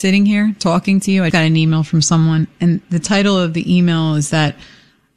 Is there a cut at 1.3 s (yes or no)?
yes